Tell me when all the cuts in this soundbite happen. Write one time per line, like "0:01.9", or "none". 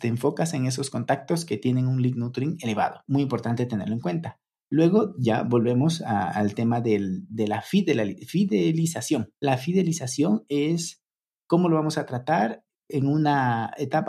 none